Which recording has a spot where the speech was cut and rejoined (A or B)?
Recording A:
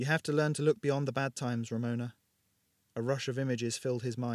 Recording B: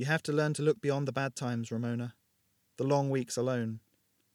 B